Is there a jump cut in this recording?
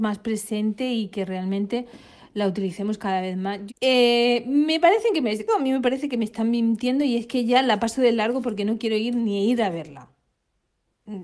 yes; 2 cuts; at 3.7 s, 5.5 s

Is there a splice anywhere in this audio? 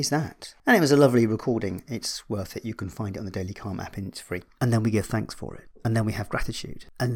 yes; 1 cut; at 4.6 s

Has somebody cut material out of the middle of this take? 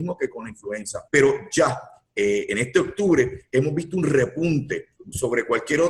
yes; 2 cuts; at 1.1 s, 5.0 s

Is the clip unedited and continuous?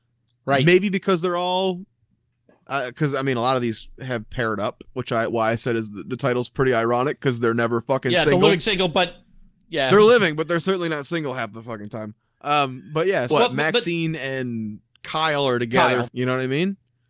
no; 2 cuts; at 13.3 s, 16.1 s

